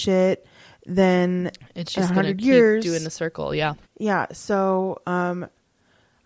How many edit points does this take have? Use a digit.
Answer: 1